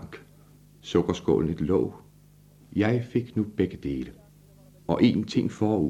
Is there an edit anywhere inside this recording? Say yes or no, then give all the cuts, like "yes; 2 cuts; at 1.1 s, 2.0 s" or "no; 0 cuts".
no; 0 cuts